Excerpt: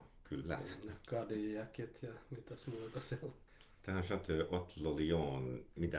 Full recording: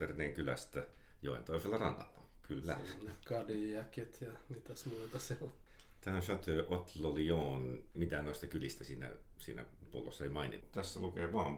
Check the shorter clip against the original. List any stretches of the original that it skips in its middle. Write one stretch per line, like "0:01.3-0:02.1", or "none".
none